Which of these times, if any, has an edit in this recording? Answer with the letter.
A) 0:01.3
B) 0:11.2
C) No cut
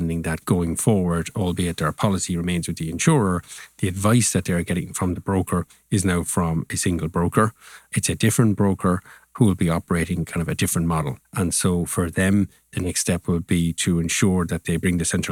B